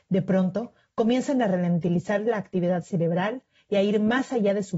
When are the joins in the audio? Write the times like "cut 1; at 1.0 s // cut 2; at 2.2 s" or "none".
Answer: none